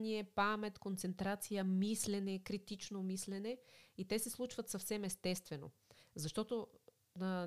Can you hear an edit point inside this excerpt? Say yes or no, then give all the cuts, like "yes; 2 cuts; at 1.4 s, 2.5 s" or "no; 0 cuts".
no; 0 cuts